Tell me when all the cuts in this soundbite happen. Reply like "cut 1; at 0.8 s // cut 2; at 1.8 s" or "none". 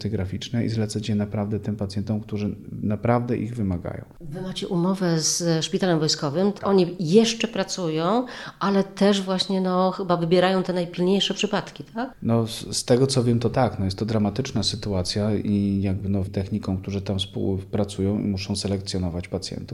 cut 1; at 16.3 s